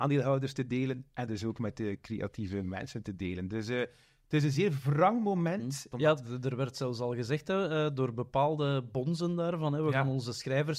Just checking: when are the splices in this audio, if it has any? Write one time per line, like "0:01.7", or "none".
0:05.9